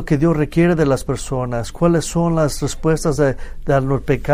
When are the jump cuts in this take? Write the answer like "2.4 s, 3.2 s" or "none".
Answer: none